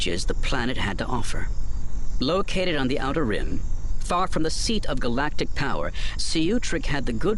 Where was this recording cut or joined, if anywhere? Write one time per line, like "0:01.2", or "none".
0:06.2